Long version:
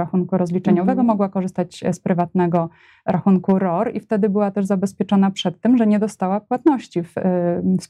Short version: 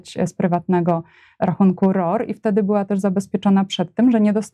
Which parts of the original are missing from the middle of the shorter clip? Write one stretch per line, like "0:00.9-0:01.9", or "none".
none